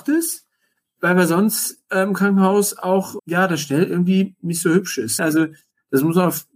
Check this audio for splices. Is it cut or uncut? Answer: cut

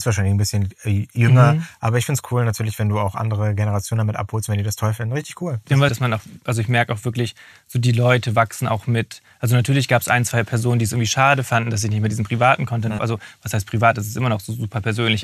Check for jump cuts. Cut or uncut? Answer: cut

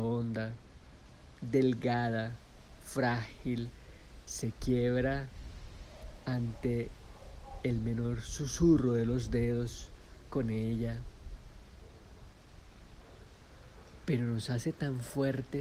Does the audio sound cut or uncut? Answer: uncut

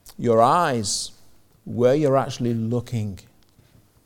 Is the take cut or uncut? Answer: uncut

